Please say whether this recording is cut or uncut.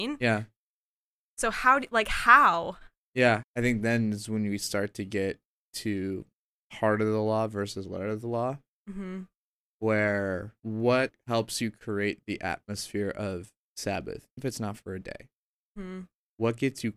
cut